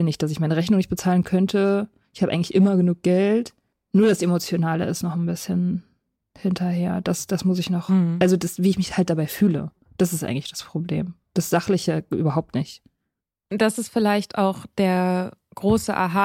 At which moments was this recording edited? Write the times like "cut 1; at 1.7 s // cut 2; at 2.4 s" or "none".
none

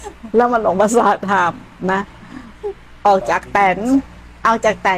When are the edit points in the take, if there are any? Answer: none

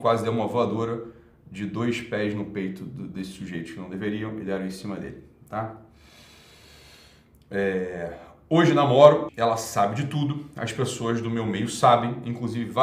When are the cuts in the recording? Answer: cut 1; at 9.3 s

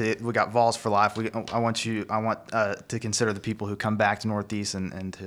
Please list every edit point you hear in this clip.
none

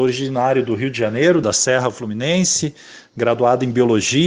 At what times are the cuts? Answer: cut 1; at 1.4 s

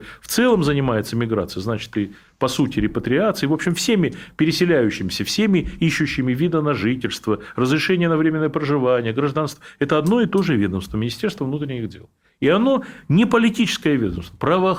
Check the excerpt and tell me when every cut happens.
none

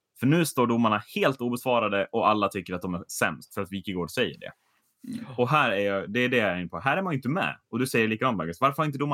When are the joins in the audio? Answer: none

